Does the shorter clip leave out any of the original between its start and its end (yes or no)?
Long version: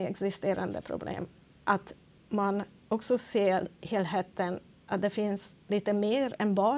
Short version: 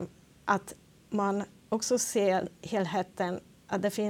no